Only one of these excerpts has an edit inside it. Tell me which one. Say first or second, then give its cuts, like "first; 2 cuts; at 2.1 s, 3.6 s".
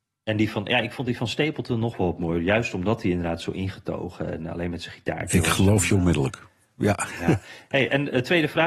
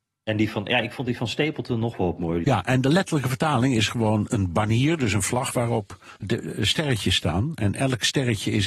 second; 2 cuts; at 2.4 s, 6.2 s